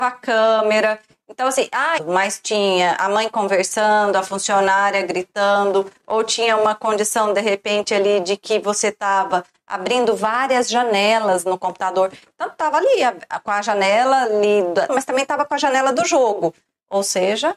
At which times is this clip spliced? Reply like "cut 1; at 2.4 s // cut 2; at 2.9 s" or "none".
cut 1; at 2.0 s // cut 2; at 14.9 s

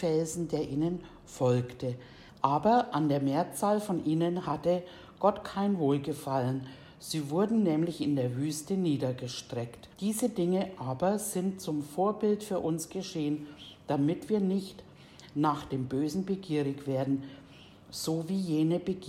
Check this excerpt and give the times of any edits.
cut 1; at 2.3 s // cut 2; at 9.9 s

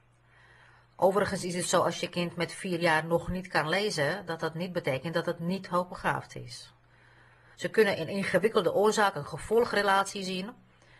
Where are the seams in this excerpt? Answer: cut 1; at 7.6 s

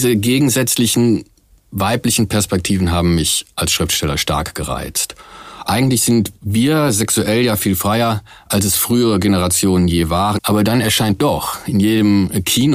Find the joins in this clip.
cut 1; at 5.6 s // cut 2; at 10.4 s

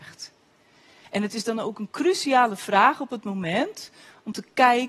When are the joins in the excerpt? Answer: cut 1; at 1.0 s

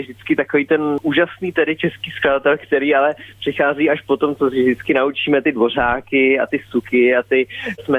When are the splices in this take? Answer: none

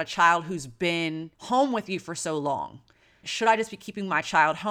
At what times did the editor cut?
cut 1; at 1.3 s // cut 2; at 3.2 s

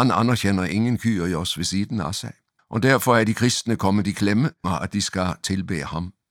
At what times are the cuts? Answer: cut 1; at 2.6 s // cut 2; at 4.6 s

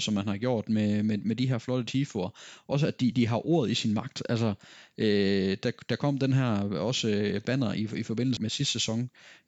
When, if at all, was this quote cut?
cut 1; at 3.1 s // cut 2; at 8.4 s

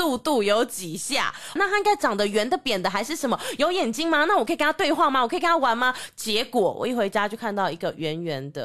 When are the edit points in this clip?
cut 1; at 1.6 s

